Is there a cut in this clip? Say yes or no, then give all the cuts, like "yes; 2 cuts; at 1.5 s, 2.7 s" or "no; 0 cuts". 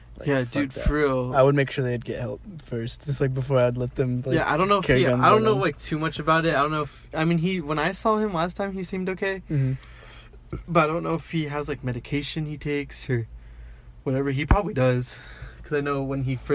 no; 0 cuts